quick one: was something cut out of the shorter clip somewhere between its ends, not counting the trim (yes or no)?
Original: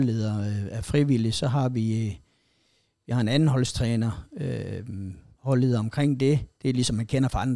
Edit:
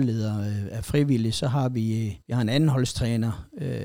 yes